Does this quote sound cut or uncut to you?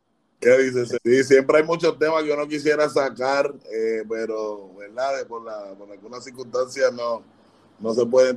cut